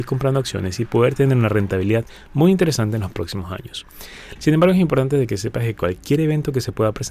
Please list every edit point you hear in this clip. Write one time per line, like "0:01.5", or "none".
0:04.4

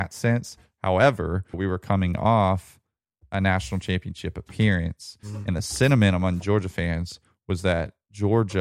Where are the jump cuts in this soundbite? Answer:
0:01.5

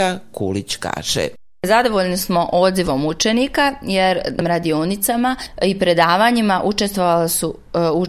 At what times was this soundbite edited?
none

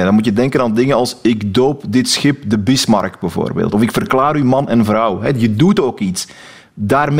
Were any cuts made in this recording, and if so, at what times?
none

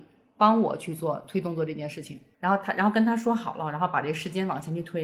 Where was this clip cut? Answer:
0:02.3

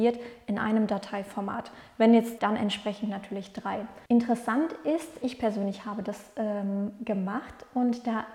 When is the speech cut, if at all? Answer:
0:02.4
0:04.1
0:05.2

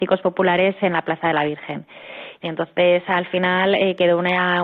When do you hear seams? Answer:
0:02.4

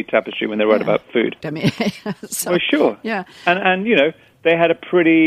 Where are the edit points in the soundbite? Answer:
0:01.4

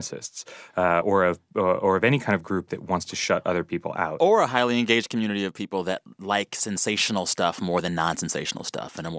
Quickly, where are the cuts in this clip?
none

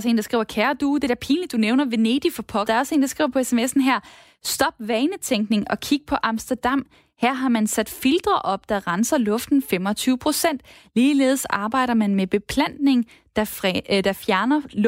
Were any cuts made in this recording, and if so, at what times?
0:02.7

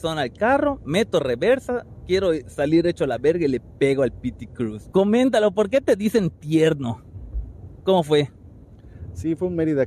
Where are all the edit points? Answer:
0:04.9
0:07.8

